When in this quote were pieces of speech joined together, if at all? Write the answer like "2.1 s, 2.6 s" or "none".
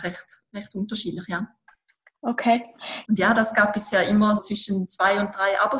3.0 s, 4.4 s